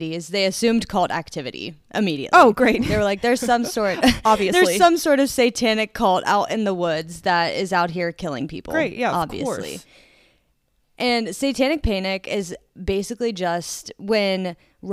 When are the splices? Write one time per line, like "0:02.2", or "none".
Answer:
none